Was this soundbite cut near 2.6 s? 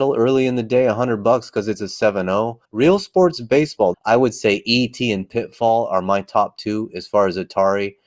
yes; 2 cuts; at 2.6 s, 3.9 s

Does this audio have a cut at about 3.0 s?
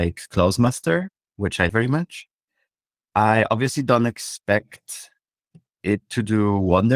no; 1 cut; at 1.7 s

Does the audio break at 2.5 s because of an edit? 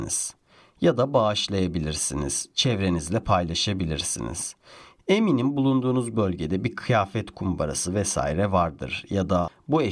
no; 0 cuts

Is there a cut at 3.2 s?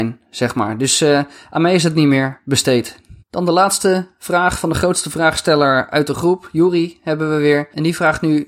yes; 1 cut; at 3.2 s

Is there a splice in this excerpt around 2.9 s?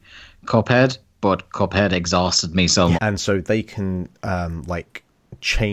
yes; 1 cut; at 2.9 s

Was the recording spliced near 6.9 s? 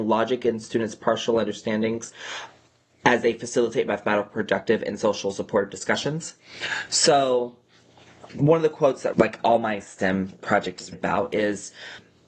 yes; 3 cuts; at 6.9 s, 9.1 s, 10.9 s

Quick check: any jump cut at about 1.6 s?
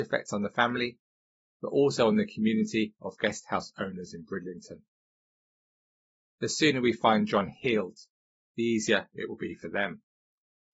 no; 0 cuts

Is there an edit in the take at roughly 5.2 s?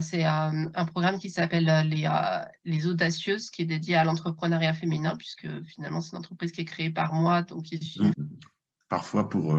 no; 1 cut; at 8.1 s

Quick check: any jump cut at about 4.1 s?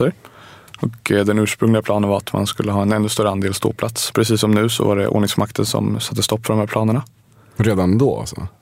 yes; 1 cut; at 4.1 s

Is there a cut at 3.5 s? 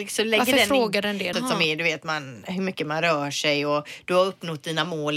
no; 1 cut; at 1.3 s

